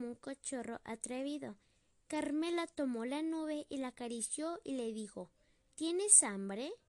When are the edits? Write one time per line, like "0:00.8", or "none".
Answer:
none

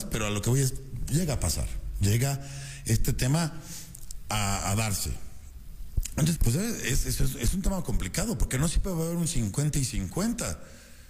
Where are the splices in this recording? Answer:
0:06.4

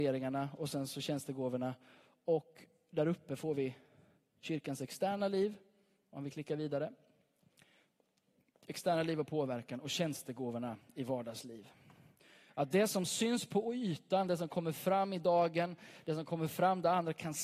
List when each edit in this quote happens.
none

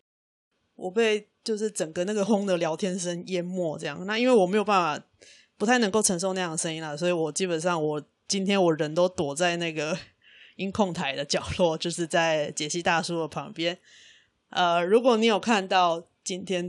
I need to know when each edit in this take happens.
0:02.3

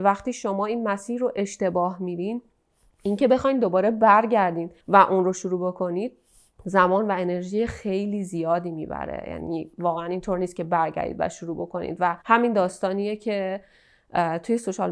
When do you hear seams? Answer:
0:04.8
0:12.2

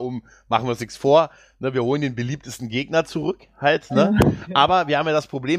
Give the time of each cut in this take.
none

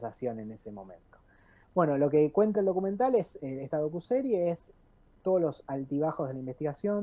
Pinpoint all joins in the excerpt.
0:02.5

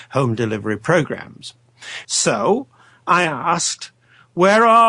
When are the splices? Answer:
0:02.0

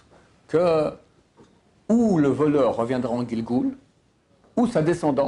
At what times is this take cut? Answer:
none

